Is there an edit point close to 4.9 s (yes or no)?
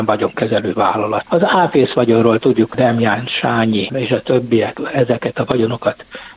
no